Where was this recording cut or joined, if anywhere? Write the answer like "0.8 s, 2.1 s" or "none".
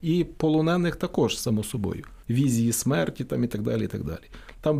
2.2 s